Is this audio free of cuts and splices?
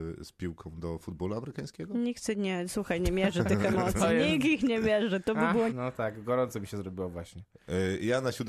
no; 1 cut; at 5.7 s

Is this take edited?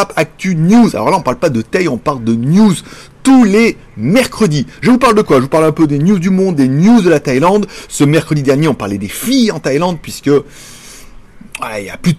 no; 0 cuts

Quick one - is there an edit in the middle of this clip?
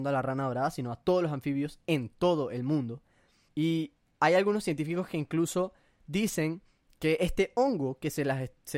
yes; 1 cut; at 3.5 s

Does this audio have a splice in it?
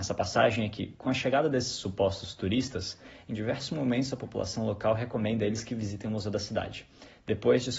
no; 0 cuts

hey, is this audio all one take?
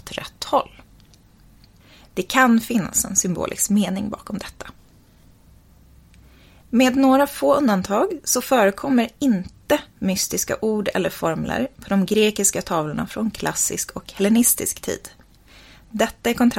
yes; 0 cuts

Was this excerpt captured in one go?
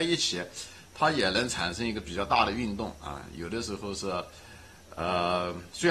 yes; 0 cuts

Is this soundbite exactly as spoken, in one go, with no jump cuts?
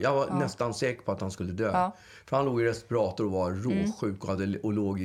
yes; 0 cuts

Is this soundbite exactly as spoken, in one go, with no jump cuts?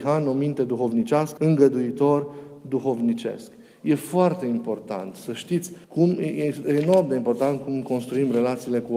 no; 2 cuts; at 1.4 s, 5.8 s

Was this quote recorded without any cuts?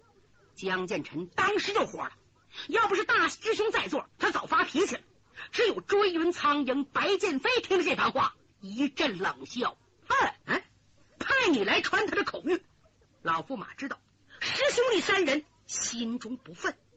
no; 2 cuts; at 10.4 s, 13.1 s

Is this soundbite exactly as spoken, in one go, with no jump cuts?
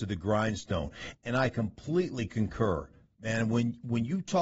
yes; 0 cuts

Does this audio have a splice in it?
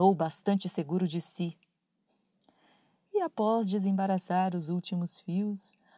no; 0 cuts

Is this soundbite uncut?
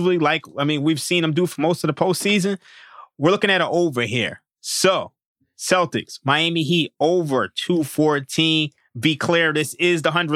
yes; 0 cuts

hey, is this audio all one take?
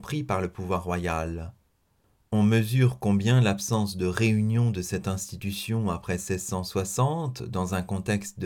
yes; 0 cuts

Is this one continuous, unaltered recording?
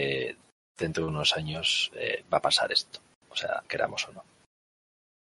no; 1 cut; at 3.6 s

